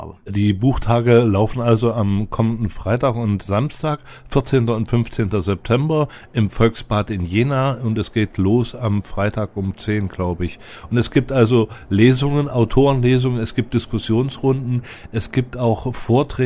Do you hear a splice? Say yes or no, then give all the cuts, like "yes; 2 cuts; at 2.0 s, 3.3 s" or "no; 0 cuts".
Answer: no; 0 cuts